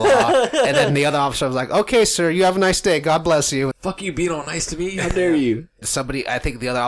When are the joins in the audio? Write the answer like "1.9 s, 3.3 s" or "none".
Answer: 3.7 s, 5.8 s